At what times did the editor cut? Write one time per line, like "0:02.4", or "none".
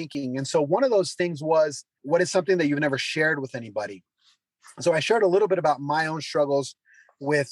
0:02.0